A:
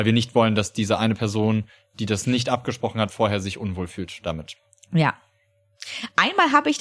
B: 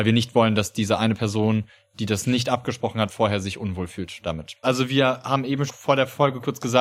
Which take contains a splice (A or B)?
B